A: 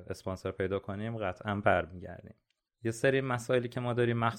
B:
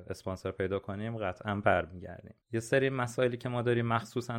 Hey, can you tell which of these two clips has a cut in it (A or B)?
B